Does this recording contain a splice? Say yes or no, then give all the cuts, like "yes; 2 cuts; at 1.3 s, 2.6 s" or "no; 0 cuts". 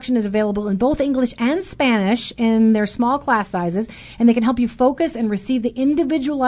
no; 0 cuts